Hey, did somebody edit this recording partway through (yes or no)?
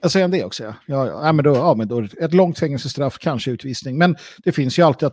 no